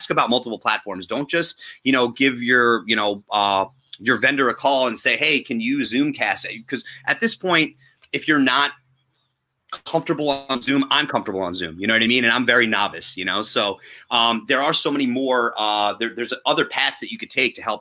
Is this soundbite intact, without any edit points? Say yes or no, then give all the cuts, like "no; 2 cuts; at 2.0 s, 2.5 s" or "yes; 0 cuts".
yes; 0 cuts